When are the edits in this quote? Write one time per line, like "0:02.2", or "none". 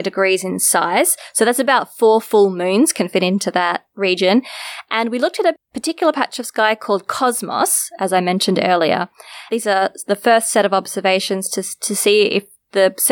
0:09.5